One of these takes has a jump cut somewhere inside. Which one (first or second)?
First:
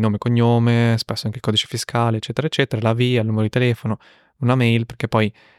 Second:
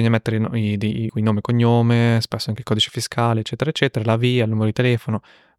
second